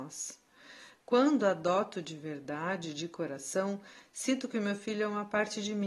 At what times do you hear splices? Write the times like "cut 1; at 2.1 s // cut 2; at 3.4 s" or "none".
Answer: none